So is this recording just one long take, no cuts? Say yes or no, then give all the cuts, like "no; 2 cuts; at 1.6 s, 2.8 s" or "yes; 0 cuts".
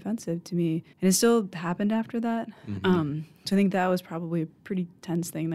no; 1 cut; at 0.9 s